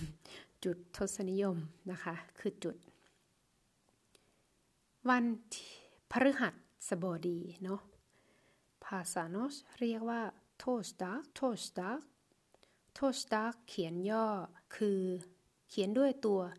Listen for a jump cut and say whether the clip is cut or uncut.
cut